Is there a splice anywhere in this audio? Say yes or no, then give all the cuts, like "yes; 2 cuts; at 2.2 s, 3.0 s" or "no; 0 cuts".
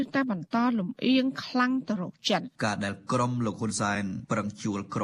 yes; 1 cut; at 2.6 s